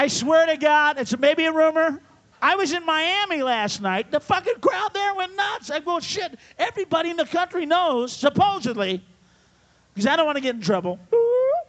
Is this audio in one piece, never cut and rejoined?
no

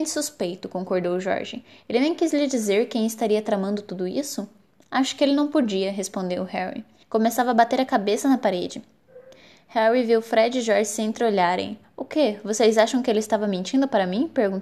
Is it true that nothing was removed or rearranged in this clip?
no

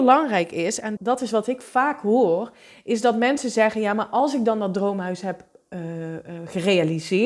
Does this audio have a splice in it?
yes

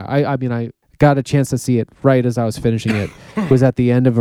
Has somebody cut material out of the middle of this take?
no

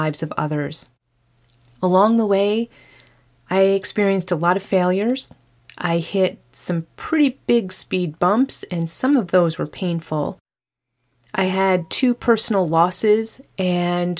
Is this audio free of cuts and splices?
yes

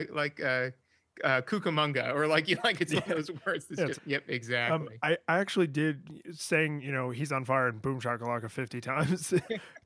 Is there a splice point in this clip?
yes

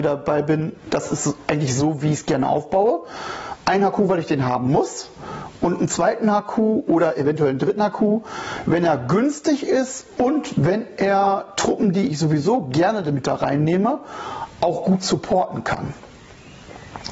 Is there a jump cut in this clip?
no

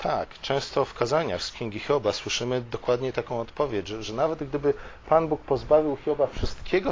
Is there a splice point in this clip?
no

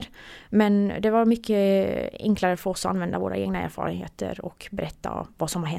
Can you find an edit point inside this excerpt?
no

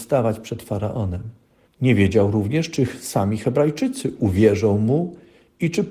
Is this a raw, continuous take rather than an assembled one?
no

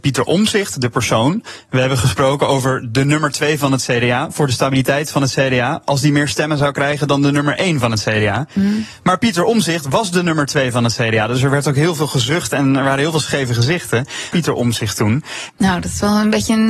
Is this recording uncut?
no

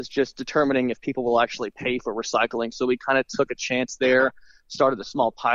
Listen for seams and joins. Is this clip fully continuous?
yes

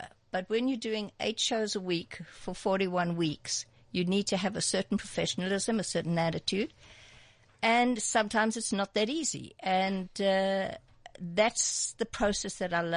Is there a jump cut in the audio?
no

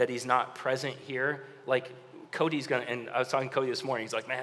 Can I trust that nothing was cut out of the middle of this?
yes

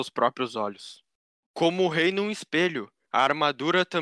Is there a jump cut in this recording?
yes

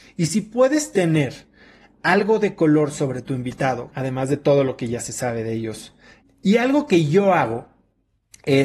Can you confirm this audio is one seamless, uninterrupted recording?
no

